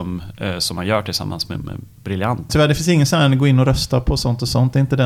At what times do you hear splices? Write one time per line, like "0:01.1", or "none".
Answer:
0:02.5